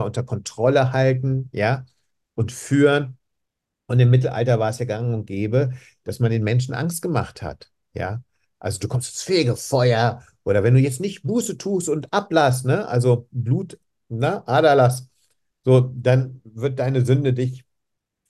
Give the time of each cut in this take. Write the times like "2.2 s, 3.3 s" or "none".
none